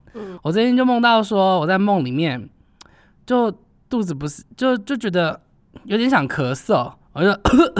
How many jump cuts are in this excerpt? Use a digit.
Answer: 0